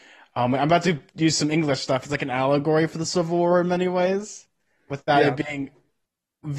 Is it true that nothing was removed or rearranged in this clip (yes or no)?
yes